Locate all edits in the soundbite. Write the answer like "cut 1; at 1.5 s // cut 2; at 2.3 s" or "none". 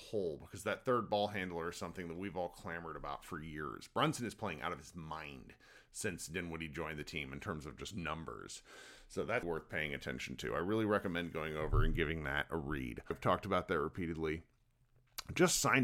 cut 1; at 9.4 s // cut 2; at 13.1 s